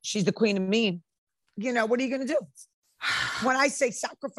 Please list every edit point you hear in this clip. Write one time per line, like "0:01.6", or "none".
0:01.5